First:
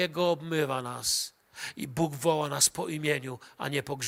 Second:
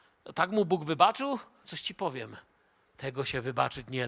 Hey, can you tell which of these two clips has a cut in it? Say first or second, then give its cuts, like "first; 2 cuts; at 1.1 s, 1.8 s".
second; 1 cut; at 1.6 s